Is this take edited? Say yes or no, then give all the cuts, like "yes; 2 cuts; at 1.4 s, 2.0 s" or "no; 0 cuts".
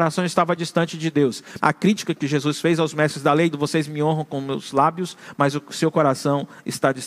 yes; 2 cuts; at 1.6 s, 3.5 s